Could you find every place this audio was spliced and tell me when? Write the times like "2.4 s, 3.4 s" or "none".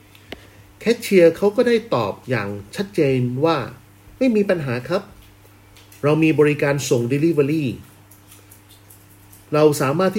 2.2 s